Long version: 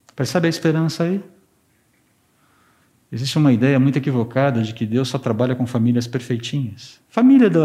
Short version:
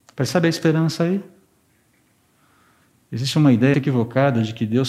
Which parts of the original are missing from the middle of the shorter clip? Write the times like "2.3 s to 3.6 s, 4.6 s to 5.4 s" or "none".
3.7 s to 3.9 s